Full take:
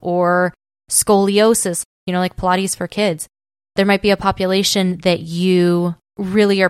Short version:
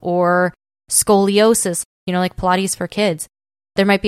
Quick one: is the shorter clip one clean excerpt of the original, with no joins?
yes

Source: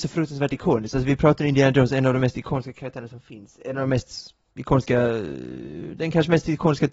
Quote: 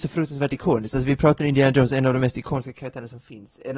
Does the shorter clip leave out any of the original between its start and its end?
no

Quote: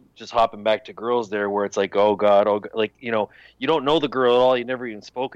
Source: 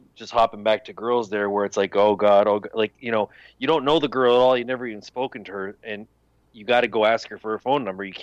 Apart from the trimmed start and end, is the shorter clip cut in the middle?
no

